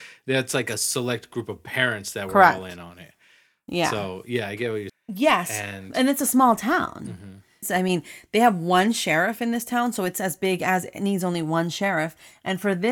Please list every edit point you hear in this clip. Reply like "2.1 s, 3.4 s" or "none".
4.9 s, 7.6 s